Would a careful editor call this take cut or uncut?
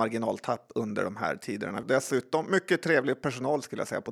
cut